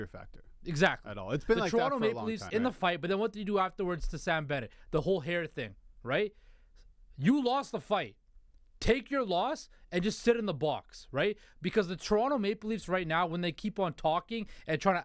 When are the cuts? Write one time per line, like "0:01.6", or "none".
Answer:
0:02.5